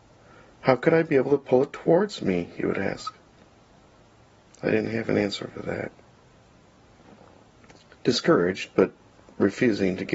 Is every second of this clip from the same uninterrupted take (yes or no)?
yes